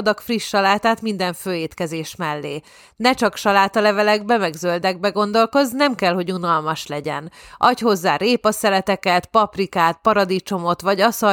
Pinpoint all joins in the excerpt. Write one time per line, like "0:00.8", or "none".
none